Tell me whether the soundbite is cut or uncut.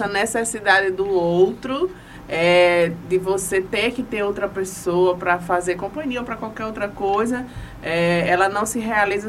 uncut